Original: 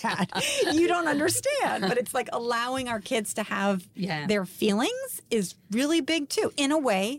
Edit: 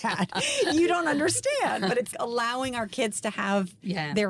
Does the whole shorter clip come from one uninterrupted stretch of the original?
no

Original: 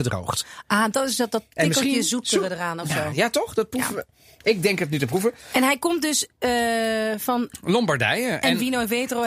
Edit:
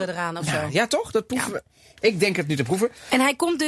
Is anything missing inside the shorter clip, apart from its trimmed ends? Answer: no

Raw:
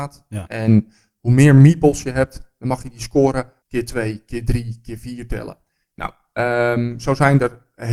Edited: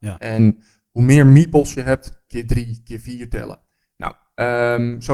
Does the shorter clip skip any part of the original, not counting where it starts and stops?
yes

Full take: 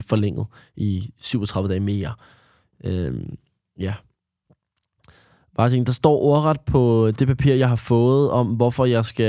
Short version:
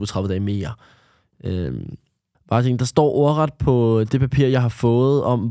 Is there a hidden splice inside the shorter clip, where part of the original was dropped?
yes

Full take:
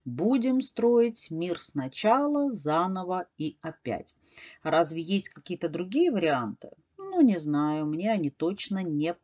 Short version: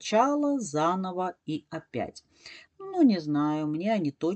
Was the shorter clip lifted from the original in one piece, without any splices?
no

